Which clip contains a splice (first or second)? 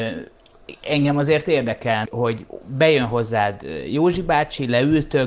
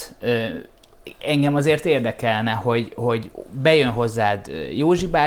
first